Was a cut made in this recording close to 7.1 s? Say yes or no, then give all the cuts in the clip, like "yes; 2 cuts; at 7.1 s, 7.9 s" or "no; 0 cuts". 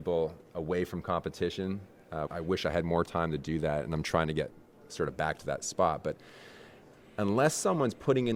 no; 1 cut; at 2.3 s